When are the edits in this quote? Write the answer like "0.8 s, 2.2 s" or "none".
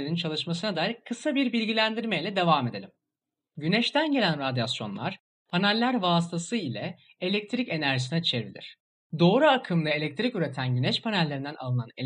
none